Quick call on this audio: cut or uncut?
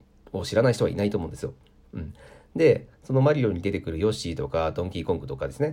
uncut